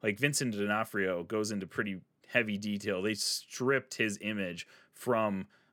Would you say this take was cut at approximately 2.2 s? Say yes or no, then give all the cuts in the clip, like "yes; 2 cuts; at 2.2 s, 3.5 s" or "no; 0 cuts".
yes; 1 cut; at 2.2 s